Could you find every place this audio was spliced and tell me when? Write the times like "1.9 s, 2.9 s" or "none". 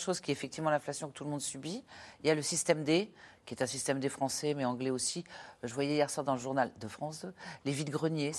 none